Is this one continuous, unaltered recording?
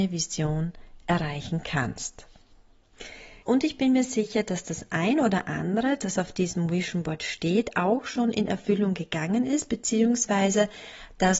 no; 1 cut; at 3.4 s

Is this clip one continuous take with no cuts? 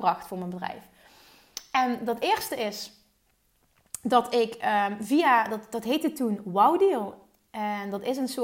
yes; 0 cuts

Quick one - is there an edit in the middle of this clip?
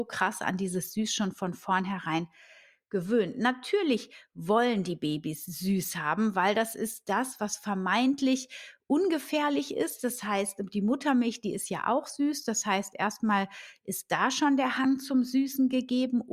no; 0 cuts

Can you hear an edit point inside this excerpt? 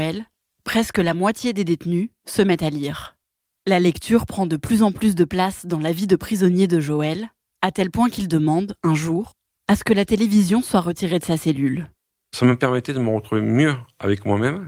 no; 0 cuts

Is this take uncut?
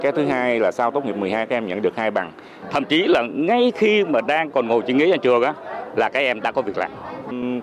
no; 1 cut; at 2.6 s

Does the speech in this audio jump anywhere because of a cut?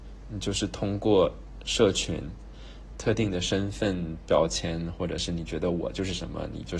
yes; 1 cut; at 2.9 s

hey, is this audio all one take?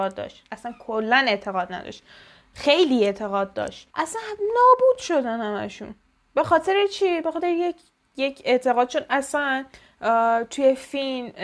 no; 1 cut; at 3.9 s

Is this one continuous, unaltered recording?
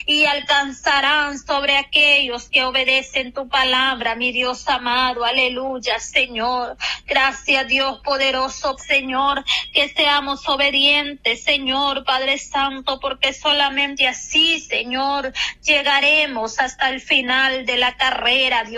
no; 1 cut; at 8.8 s

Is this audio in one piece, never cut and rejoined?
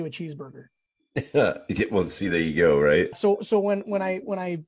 no; 1 cut; at 3.1 s

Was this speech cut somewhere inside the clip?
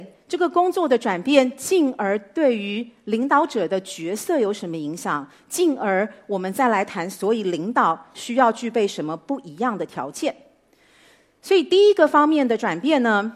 no; 0 cuts

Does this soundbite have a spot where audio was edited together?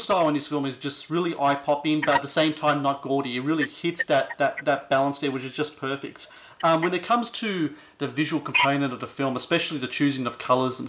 no; 0 cuts

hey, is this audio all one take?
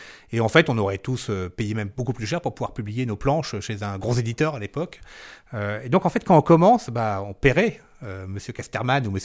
yes; 0 cuts

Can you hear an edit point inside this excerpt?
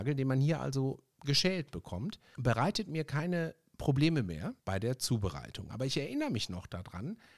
yes; 3 cuts; at 1.1 s, 2.3 s, 4.6 s

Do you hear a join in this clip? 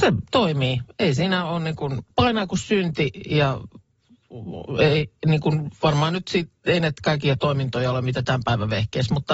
yes; 1 cut; at 2.1 s

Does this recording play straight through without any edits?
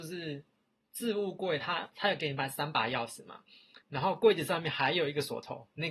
no; 2 cuts; at 1.9 s, 3.8 s

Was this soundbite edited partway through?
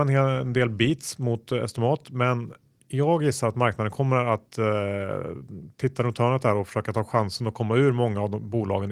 no; 0 cuts

